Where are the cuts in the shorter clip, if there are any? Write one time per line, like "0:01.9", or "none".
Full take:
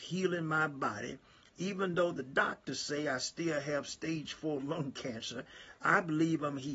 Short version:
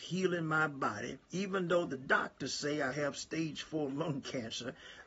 0:01.2
0:02.9